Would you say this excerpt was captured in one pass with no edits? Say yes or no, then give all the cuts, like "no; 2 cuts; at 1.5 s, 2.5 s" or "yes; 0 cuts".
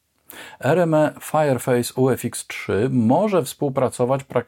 yes; 0 cuts